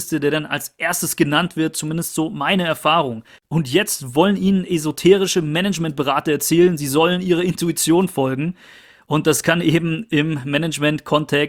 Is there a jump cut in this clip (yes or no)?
yes